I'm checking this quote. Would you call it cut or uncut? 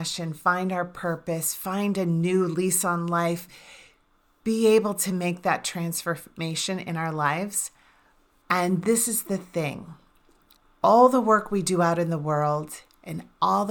cut